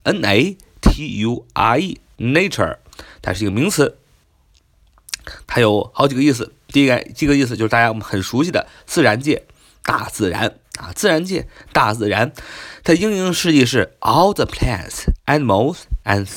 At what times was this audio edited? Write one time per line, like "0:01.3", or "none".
none